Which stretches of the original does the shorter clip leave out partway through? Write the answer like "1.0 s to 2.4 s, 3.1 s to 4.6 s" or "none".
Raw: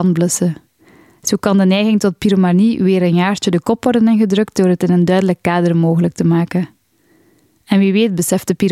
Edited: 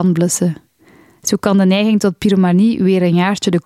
none